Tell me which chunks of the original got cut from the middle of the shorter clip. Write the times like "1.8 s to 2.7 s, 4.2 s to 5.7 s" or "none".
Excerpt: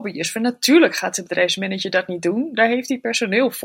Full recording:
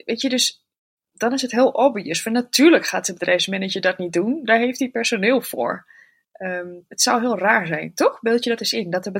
none